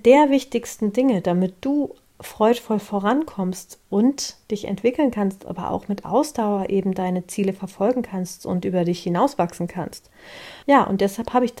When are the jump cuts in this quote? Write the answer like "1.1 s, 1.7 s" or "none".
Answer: 10.6 s